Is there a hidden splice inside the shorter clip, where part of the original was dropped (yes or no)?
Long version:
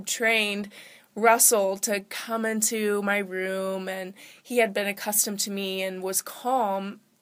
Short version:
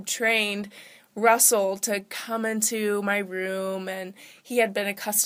no